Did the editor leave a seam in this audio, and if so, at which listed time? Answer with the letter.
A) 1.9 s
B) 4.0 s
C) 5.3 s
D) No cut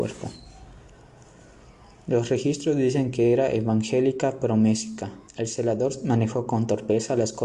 C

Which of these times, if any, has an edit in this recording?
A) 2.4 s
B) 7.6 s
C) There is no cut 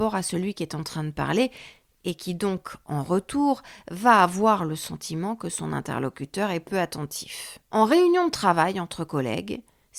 C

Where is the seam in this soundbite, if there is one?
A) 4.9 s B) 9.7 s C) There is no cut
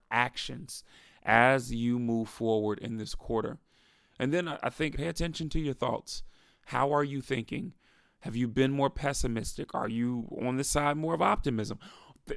A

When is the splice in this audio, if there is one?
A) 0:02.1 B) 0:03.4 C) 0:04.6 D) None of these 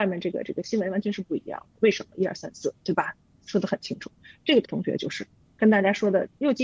C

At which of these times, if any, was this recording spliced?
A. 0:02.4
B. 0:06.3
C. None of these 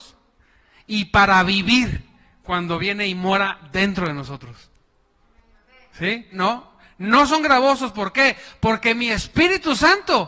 B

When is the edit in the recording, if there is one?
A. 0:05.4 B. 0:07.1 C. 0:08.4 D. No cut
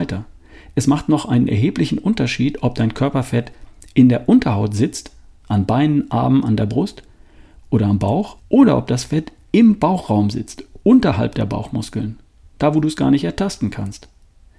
C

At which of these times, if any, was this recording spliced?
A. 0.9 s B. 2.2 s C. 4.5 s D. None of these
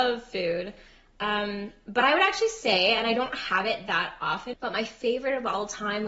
C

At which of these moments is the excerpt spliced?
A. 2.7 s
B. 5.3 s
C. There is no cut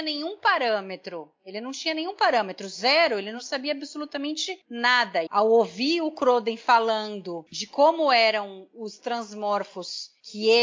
B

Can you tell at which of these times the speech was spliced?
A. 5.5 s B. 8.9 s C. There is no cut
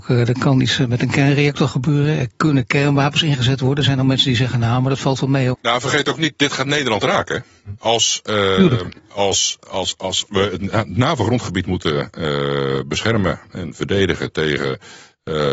A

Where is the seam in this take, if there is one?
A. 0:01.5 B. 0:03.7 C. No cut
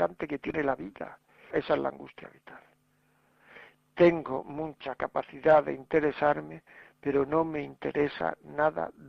A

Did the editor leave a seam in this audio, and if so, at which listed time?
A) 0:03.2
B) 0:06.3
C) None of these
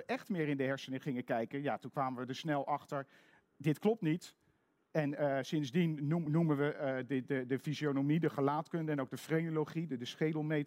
C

